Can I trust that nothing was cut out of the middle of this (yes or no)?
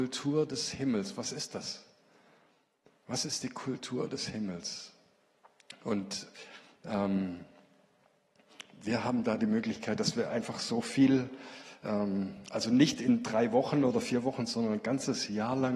yes